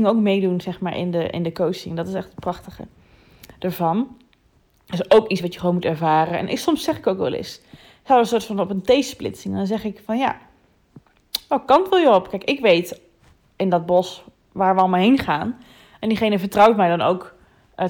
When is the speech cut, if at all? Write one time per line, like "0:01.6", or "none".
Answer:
none